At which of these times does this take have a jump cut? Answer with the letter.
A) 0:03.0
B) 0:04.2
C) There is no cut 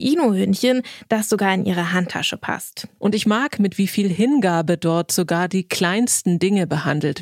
A